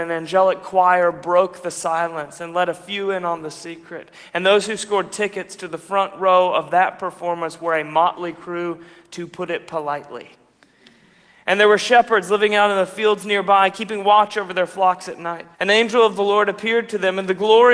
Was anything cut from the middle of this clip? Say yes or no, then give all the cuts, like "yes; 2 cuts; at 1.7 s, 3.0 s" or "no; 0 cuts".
yes; 1 cut; at 15.5 s